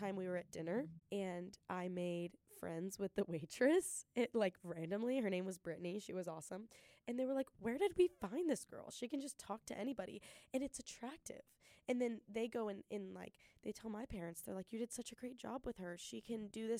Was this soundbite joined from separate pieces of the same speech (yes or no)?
no